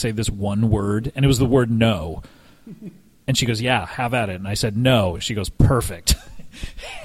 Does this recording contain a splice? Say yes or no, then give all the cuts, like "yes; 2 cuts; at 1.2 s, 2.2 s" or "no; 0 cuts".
no; 0 cuts